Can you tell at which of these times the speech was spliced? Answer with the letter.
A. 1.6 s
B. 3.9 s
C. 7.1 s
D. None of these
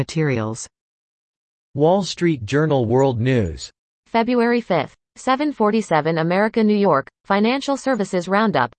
D